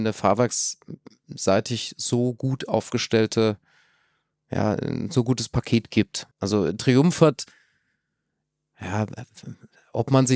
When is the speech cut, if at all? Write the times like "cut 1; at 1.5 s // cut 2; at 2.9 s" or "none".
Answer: cut 1; at 6.3 s